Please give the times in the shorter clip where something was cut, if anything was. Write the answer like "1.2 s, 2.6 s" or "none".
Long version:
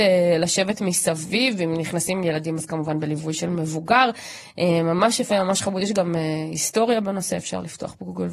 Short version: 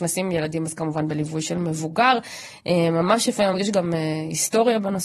3.5 s